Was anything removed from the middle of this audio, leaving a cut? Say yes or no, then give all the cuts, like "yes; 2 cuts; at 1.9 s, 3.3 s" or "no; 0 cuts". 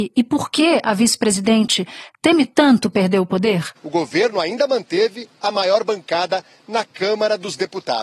yes; 1 cut; at 3.8 s